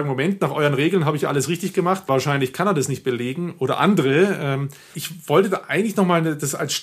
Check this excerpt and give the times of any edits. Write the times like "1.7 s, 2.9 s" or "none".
4.9 s